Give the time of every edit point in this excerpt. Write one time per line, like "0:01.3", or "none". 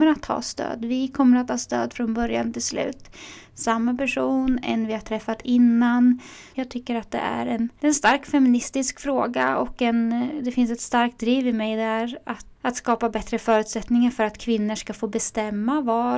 0:06.5
0:12.6